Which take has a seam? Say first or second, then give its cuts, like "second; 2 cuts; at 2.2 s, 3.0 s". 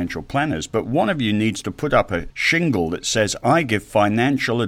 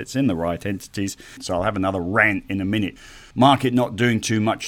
second; 1 cut; at 1.4 s